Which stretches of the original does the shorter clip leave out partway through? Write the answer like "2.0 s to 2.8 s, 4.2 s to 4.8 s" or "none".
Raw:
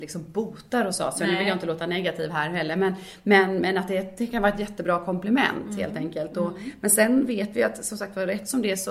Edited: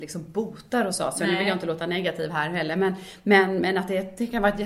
none